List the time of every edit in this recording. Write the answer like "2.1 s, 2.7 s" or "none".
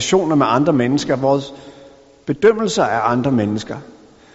none